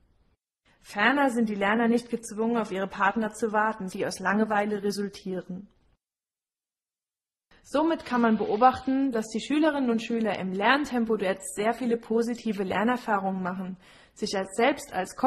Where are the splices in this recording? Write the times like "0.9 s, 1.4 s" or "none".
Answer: 3.9 s